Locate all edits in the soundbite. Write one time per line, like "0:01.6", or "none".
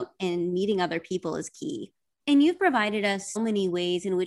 0:02.2
0:03.4

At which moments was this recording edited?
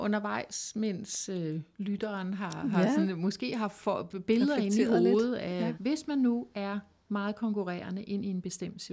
0:05.7

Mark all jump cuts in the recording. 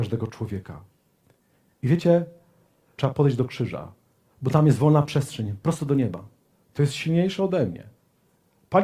0:03.0
0:06.5

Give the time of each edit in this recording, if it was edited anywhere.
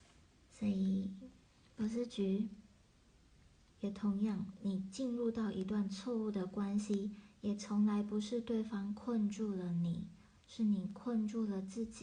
0:03.7

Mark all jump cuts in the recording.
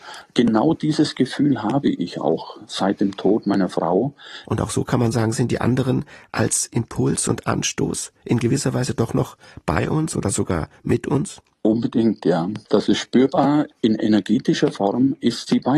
0:04.4
0:13.7

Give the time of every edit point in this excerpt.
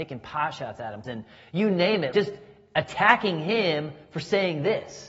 0:01.0
0:02.1

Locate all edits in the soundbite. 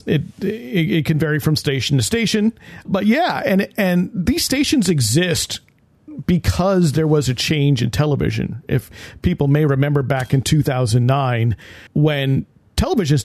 0:02.9
0:11.9

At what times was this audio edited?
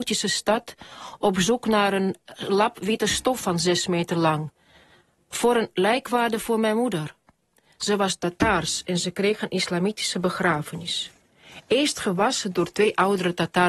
none

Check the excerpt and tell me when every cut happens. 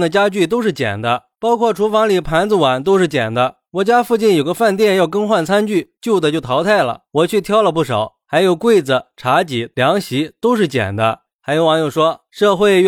0:09.7
0:11.3

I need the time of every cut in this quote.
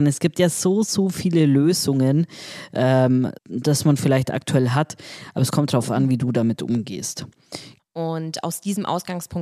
0:03.4
0:07.8

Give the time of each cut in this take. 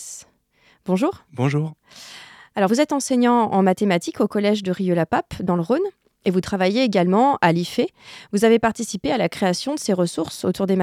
none

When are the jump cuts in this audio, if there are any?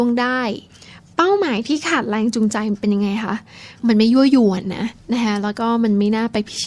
none

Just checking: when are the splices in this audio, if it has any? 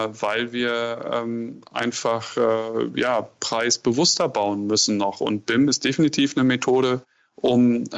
none

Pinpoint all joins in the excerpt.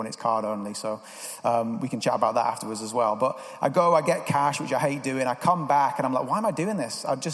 none

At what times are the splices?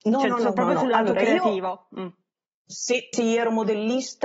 0:03.1

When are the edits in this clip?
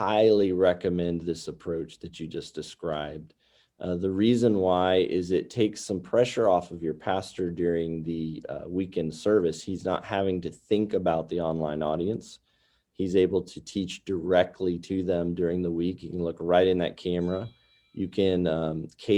none

